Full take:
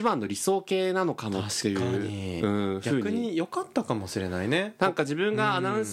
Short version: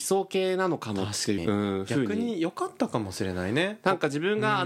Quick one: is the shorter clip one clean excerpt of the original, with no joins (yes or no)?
no